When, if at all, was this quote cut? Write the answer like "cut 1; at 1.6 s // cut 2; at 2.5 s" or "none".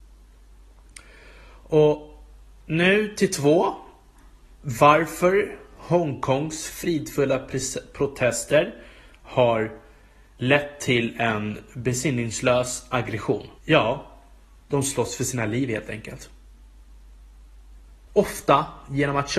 cut 1; at 13.6 s // cut 2; at 18.1 s